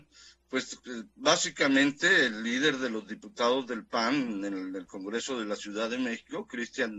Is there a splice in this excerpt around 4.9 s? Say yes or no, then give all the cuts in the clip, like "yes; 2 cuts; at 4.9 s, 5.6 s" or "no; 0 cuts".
no; 0 cuts